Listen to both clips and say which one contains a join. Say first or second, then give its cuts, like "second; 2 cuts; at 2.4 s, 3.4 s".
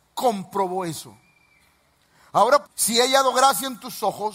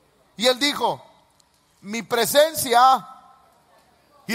first; 1 cut; at 2.6 s